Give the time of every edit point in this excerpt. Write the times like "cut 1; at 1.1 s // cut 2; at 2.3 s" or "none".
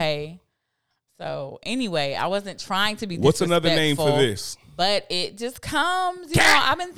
none